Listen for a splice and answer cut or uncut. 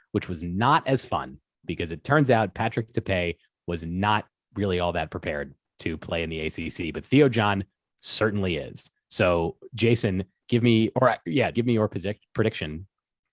cut